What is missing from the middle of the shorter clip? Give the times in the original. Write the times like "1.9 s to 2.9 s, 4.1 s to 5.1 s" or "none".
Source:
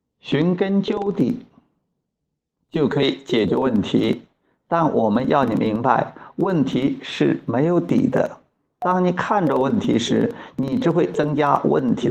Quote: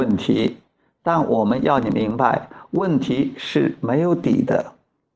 none

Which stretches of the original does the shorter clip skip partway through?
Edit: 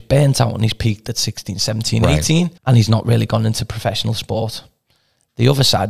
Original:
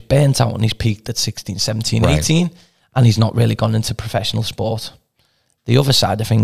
2.6 s to 2.9 s

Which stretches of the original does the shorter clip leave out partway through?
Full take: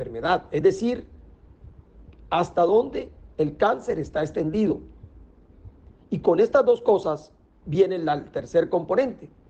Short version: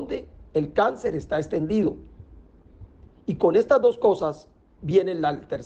none

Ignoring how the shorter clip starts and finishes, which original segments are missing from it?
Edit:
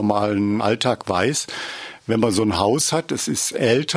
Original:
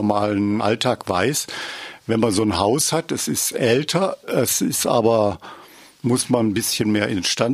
none

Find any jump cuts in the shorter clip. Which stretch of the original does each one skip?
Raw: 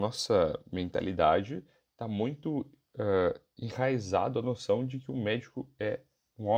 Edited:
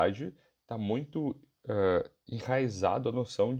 none

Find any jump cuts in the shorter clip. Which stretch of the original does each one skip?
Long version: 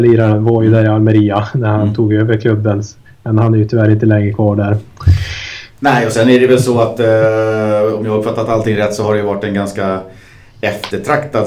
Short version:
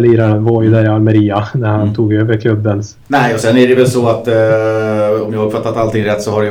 3.0 s to 5.7 s

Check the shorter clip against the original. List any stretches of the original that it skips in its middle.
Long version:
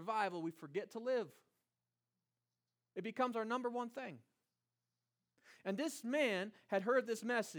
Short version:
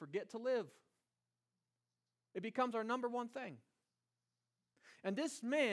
none

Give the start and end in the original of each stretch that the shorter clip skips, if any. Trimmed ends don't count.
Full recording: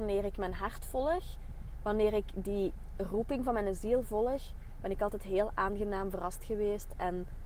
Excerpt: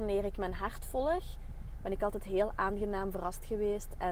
1.8 s to 4.8 s

